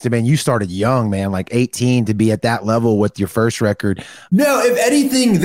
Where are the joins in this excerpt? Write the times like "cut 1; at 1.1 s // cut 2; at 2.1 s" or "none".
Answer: cut 1; at 4.3 s